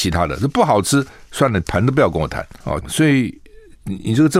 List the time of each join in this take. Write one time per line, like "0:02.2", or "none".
0:02.8